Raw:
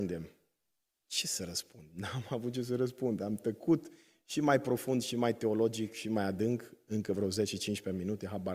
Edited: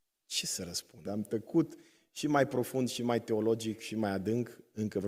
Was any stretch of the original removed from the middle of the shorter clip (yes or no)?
yes